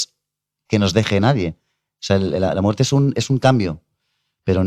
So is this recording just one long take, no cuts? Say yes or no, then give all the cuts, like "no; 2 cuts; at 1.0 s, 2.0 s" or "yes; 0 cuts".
yes; 0 cuts